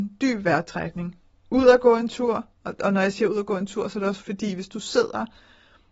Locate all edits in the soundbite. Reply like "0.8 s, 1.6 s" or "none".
4.2 s